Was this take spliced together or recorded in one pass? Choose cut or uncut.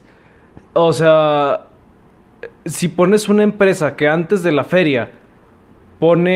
uncut